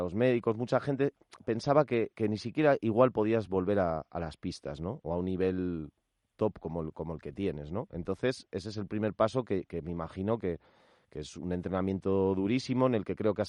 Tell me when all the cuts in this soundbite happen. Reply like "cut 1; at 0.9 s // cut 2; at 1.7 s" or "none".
none